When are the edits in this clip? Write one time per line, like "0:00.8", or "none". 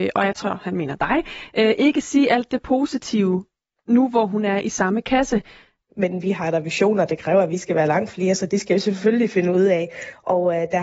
0:05.9